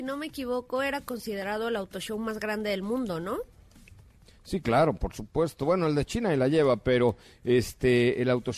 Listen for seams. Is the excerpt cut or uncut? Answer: uncut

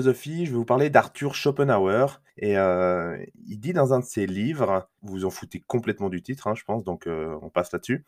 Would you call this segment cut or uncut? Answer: cut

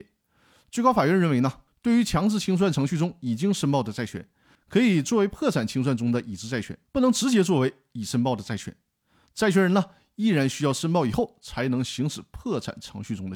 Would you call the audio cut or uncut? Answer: cut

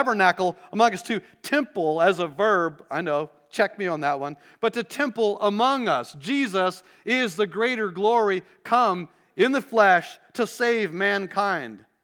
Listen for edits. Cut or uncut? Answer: uncut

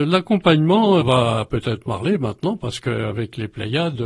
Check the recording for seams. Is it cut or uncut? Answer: cut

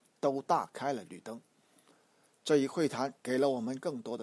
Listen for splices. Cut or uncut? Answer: uncut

